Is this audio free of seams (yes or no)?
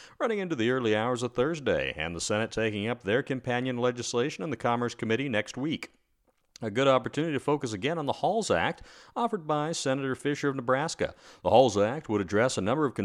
yes